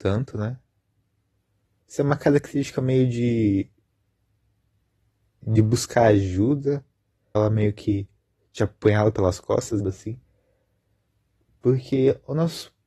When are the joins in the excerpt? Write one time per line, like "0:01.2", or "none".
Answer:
0:01.8
0:07.3
0:09.8